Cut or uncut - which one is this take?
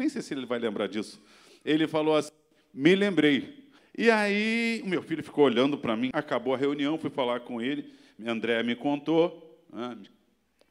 cut